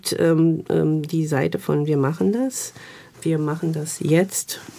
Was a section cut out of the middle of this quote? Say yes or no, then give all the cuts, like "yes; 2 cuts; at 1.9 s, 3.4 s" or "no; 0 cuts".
no; 0 cuts